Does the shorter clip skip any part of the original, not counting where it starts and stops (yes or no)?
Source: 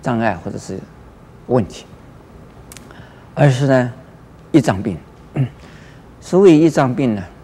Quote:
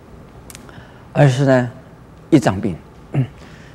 no